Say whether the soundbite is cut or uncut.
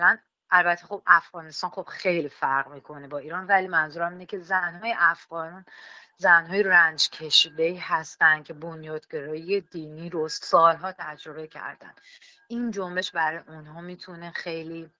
uncut